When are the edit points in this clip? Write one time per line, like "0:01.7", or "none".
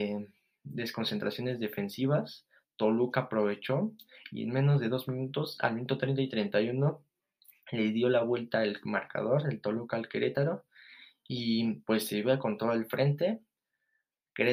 none